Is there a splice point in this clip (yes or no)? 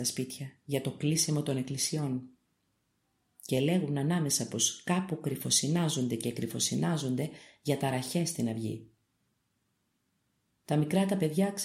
no